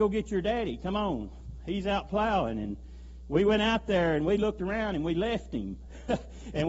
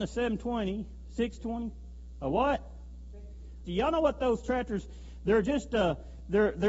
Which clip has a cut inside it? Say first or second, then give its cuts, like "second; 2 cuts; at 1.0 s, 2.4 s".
second; 1 cut; at 3.7 s